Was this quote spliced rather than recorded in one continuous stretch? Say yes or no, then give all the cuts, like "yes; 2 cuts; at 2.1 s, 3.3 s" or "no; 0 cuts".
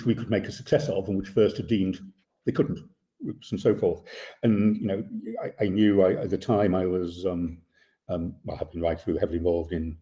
no; 0 cuts